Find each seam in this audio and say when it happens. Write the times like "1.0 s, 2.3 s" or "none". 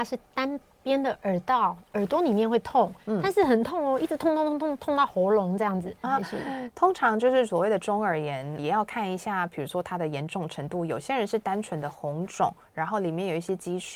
6.0 s, 8.6 s

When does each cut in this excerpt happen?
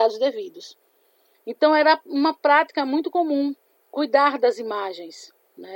1.3 s

